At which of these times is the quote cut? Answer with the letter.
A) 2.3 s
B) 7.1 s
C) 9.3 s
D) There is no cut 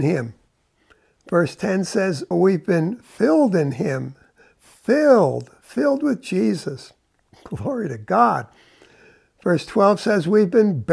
A